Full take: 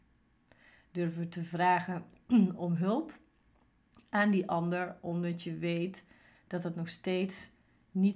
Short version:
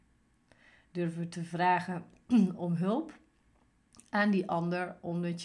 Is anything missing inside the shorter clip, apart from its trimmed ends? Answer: no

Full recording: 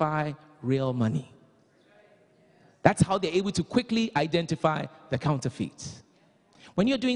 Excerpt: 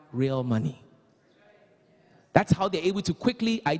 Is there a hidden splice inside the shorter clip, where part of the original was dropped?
no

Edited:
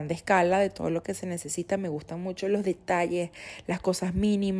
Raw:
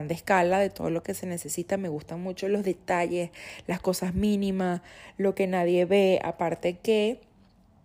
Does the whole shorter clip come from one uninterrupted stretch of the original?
yes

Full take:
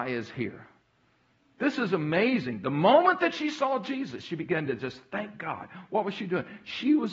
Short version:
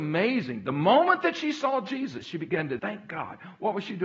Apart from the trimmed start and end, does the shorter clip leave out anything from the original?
yes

